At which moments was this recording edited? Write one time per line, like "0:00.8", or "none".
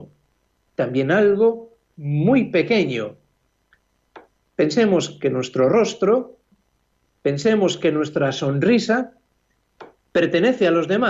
none